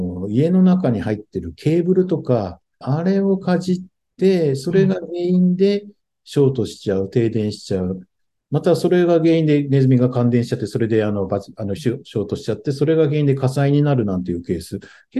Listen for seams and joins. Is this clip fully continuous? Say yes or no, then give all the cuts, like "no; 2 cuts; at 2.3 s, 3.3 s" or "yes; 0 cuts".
no; 1 cut; at 2.8 s